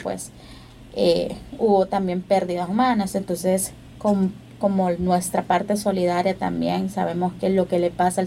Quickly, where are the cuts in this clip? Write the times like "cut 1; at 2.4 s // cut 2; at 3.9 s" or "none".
cut 1; at 4.0 s